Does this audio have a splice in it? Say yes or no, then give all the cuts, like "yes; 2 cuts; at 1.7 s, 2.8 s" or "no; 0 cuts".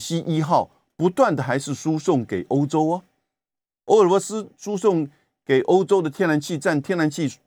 no; 0 cuts